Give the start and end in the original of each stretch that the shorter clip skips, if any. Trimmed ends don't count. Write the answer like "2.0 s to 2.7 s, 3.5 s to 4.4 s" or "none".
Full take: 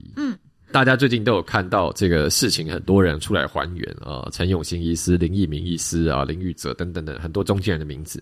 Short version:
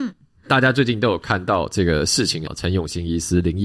2.7 s to 4.2 s